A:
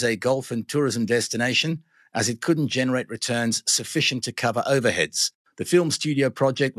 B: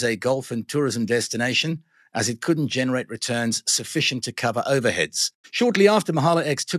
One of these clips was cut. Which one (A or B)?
B